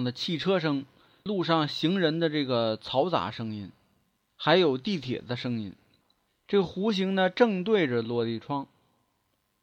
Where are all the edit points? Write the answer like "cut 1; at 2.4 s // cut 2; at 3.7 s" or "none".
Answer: cut 1; at 6.3 s